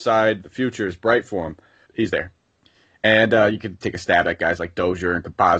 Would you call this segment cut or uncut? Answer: cut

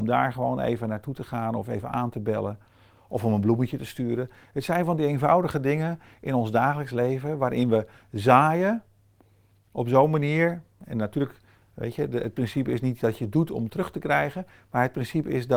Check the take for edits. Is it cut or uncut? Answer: uncut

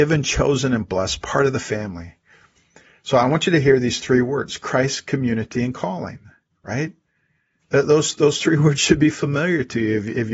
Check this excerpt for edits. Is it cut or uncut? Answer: uncut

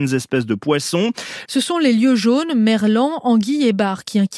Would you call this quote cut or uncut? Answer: cut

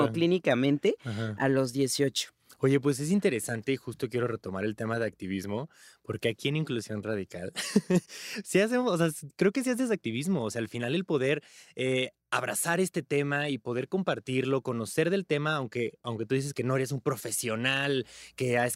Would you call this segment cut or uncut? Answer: uncut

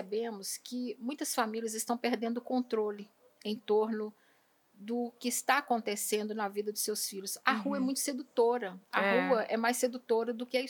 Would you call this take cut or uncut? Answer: uncut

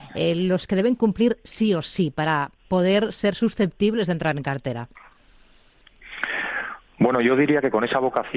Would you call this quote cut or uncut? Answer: uncut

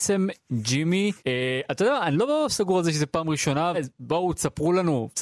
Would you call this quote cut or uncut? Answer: cut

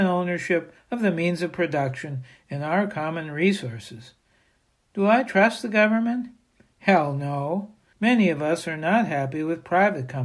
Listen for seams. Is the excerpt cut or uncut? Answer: cut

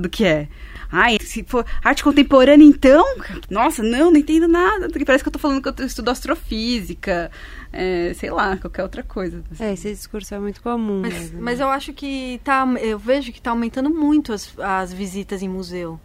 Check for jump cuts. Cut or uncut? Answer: cut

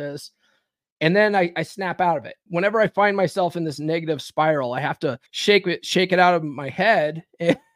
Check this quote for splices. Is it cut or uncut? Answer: cut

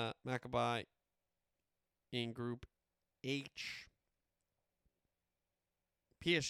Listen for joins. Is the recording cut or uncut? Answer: uncut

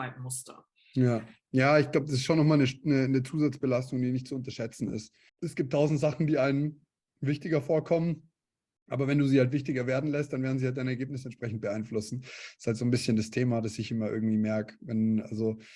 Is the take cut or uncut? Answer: cut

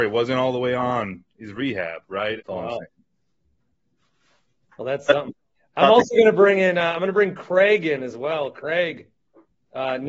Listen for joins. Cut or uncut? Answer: cut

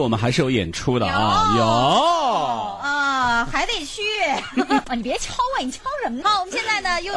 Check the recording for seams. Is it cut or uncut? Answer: cut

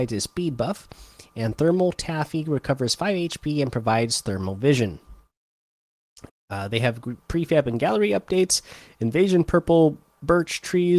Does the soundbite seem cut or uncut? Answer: cut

